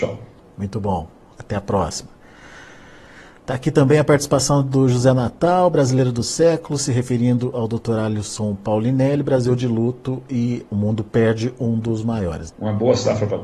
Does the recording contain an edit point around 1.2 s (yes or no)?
no